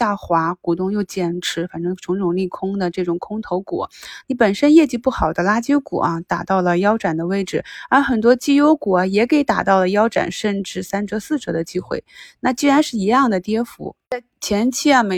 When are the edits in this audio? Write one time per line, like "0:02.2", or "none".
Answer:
0:04.2